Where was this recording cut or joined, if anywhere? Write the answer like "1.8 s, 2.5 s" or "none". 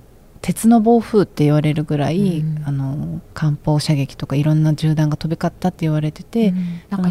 3.3 s